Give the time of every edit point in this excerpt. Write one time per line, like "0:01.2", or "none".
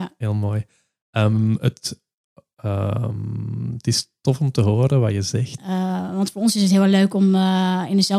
0:05.6